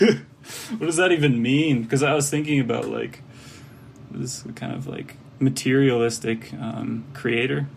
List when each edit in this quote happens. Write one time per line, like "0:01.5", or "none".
none